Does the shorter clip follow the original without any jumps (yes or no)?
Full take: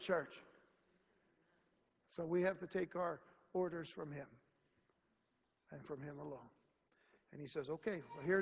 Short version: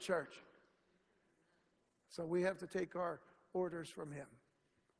yes